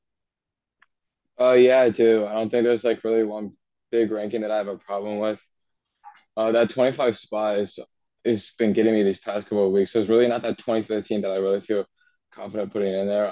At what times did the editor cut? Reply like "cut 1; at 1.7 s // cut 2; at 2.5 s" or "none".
none